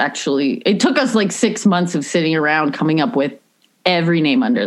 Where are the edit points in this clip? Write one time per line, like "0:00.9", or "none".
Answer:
none